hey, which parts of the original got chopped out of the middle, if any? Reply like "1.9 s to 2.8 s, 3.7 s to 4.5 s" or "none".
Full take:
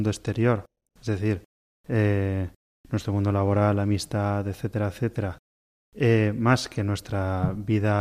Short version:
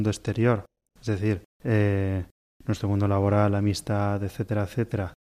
1.5 s to 1.8 s